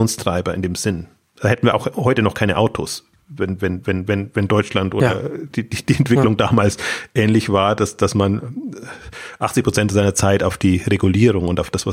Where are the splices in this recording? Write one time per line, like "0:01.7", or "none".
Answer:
none